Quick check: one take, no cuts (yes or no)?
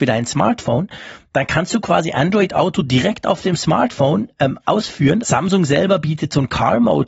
no